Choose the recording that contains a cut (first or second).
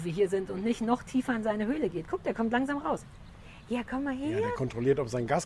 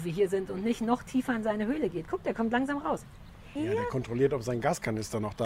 second